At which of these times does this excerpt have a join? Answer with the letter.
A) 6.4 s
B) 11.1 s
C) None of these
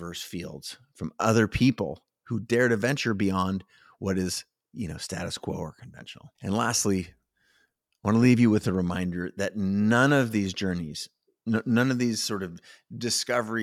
A